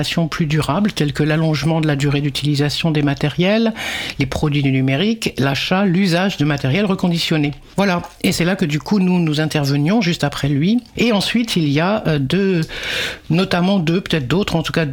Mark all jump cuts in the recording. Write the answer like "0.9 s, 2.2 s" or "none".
11.0 s

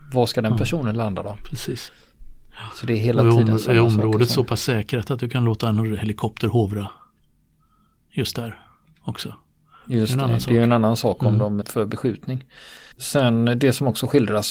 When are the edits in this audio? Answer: 11.6 s, 12.9 s

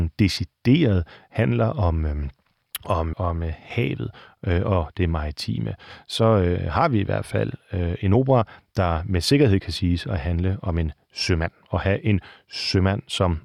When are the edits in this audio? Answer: 3.1 s

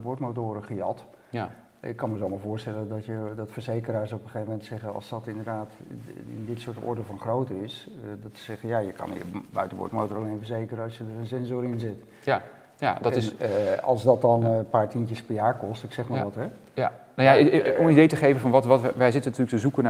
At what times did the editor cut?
none

